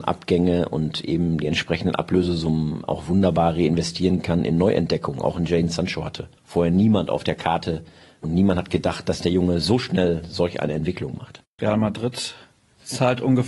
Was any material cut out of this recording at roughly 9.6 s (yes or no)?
no